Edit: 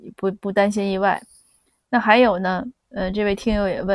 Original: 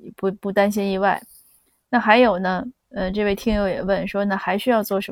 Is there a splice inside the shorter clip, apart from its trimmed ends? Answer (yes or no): no